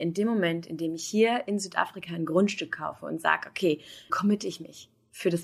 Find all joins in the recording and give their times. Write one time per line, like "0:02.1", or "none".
0:04.1